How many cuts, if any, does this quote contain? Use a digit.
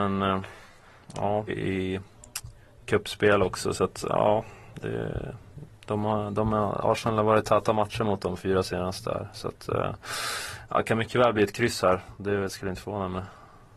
1